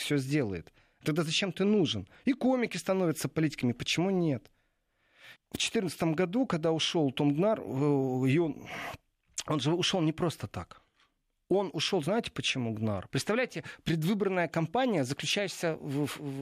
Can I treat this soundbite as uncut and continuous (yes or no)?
no